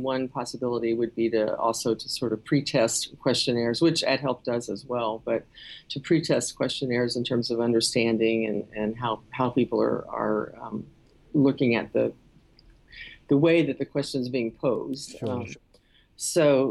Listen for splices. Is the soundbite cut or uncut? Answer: uncut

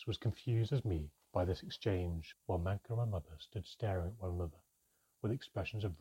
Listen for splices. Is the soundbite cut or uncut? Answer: cut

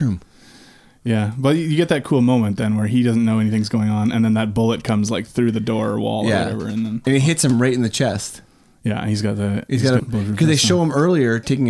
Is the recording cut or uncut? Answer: cut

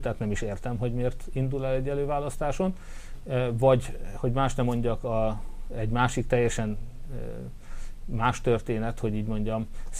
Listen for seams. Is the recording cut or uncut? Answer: uncut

